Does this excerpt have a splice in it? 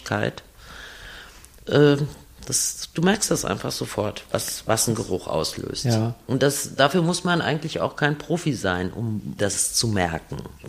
yes; 1 cut; at 9.4 s

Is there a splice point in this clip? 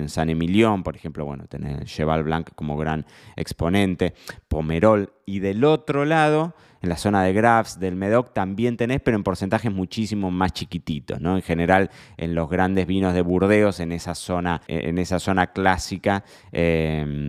yes; 1 cut; at 14.7 s

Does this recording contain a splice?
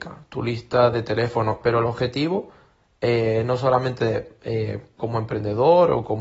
yes; 1 cut; at 1.6 s

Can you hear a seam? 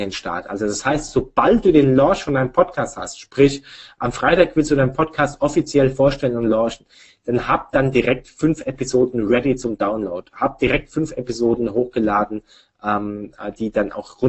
no; 0 cuts

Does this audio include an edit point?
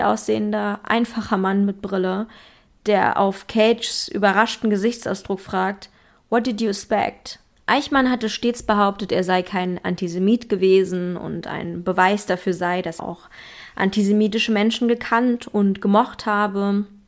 yes; 2 cuts; at 7.6 s, 13.0 s

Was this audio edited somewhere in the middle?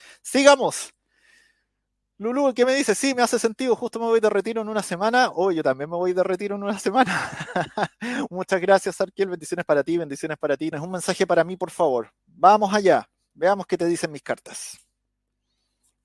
yes; 1 cut; at 10.7 s

